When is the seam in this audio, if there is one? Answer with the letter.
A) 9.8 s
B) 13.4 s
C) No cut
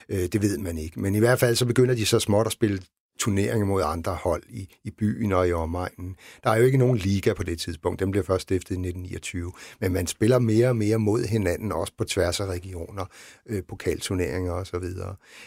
C